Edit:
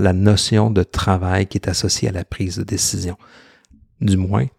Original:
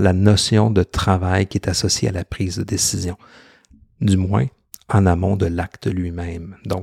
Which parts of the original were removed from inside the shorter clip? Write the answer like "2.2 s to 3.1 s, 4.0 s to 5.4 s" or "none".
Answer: none